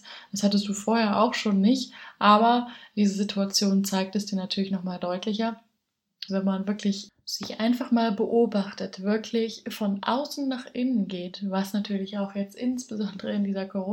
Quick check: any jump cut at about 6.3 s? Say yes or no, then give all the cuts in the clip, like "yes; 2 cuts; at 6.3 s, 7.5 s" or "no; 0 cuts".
yes; 1 cut; at 6.3 s